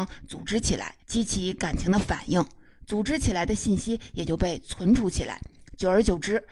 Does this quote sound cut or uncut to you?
cut